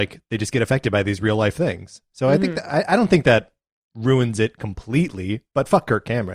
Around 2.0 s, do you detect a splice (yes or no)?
no